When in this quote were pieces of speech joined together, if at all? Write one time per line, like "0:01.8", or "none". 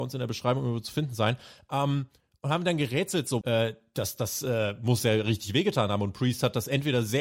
0:03.4